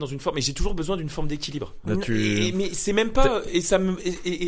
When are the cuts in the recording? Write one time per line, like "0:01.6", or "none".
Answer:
0:01.8